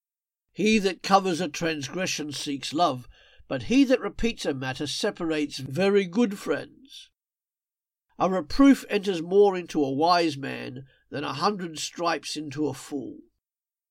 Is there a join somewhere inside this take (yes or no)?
no